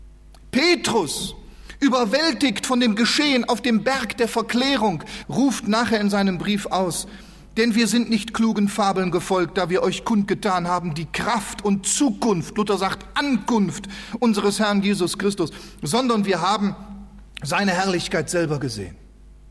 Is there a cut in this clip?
yes; 1 cut; at 5.2 s

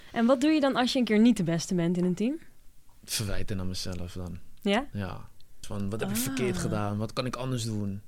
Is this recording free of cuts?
no; 1 cut; at 5.6 s

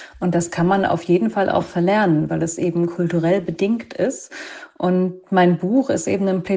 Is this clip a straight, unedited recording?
yes; 0 cuts

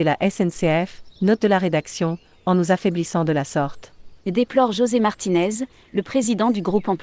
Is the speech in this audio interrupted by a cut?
no; 0 cuts

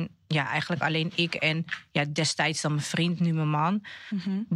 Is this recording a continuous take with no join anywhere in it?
yes; 0 cuts

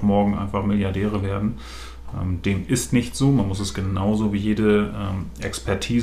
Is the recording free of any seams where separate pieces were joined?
yes; 0 cuts

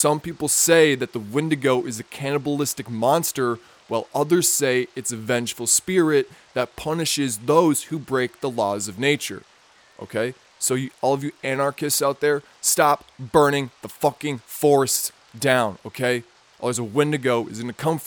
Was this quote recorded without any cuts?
yes; 0 cuts

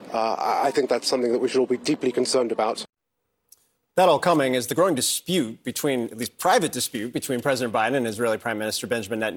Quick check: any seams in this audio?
no; 0 cuts

